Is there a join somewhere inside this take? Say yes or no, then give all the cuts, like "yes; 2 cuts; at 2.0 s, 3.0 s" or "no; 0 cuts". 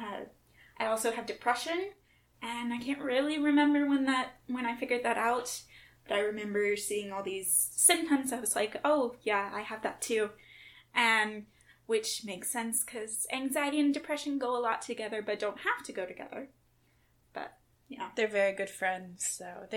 no; 0 cuts